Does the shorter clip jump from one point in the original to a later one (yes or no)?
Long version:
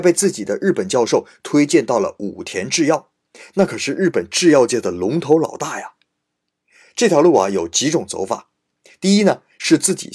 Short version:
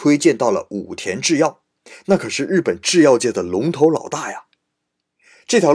no